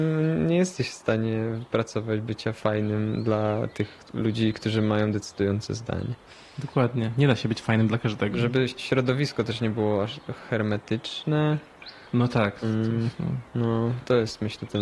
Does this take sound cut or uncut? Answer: cut